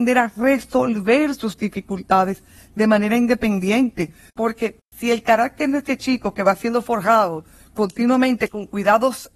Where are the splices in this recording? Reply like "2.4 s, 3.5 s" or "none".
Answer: 4.3 s